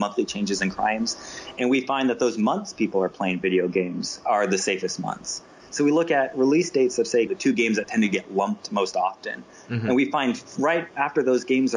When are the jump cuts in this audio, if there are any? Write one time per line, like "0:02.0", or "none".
0:05.7
0:07.3